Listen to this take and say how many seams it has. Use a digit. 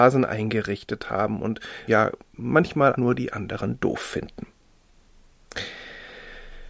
2